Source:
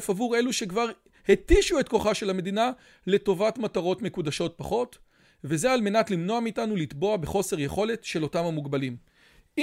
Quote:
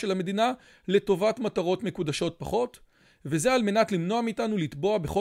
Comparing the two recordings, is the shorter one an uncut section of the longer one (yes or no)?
yes